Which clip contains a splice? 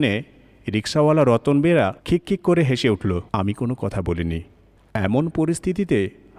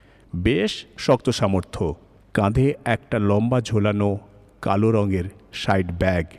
first; 2 cuts; at 2.0 s, 3.3 s

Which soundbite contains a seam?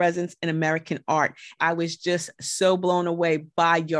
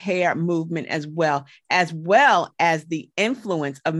first; 1 cut; at 1.6 s

